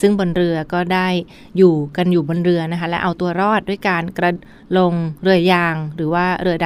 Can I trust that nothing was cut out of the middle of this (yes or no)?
no